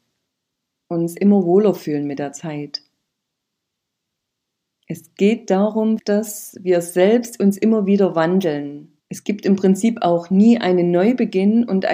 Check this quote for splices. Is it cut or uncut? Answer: cut